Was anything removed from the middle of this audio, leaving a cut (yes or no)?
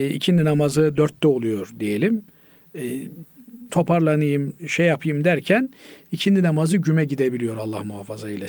yes